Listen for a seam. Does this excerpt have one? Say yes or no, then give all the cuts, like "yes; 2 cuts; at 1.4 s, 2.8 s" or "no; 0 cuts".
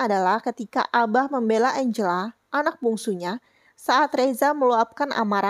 no; 0 cuts